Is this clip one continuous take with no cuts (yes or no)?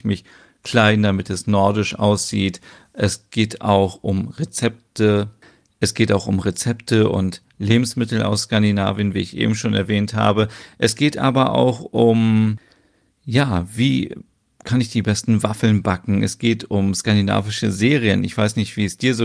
yes